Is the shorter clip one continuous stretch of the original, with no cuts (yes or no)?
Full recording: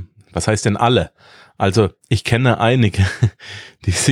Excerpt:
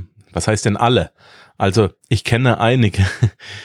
yes